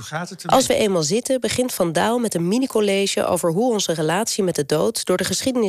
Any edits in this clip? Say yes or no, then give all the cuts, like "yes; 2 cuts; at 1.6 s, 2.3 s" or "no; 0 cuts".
no; 0 cuts